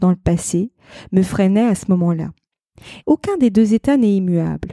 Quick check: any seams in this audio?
yes; 1 cut; at 3.0 s

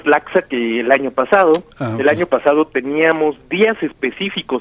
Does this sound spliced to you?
no; 0 cuts

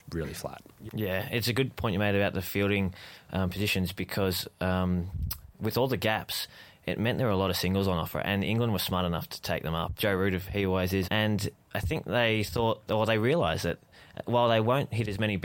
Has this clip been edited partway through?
yes; 2 cuts; at 10.0 s, 11.0 s

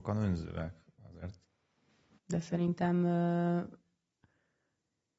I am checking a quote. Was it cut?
yes; 1 cut; at 2.2 s

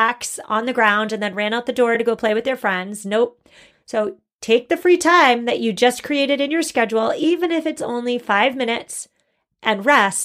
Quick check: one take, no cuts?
no; 1 cut; at 3.7 s

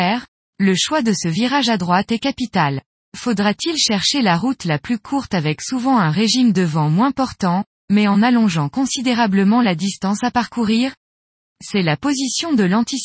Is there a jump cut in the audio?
yes; 1 cut; at 7.7 s

